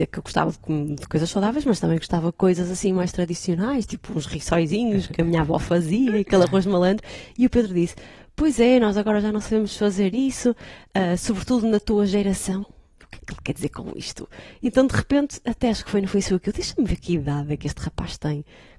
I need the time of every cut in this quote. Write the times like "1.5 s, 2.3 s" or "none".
12.6 s